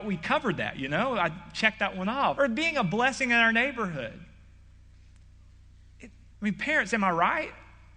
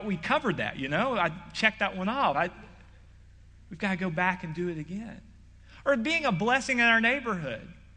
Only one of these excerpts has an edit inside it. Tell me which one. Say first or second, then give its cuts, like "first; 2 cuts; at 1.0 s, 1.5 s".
first; 2 cuts; at 2.3 s, 6.3 s